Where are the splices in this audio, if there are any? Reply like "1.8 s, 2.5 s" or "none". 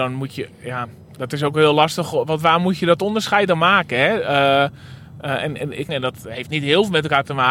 5.9 s